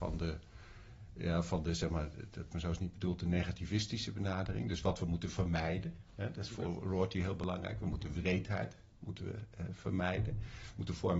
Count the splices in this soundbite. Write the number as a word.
one